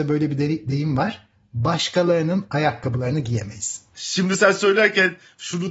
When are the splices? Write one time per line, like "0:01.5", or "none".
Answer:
0:03.9